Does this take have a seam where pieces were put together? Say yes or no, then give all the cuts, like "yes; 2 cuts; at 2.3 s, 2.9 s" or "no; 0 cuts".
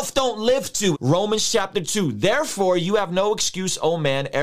yes; 1 cut; at 0.9 s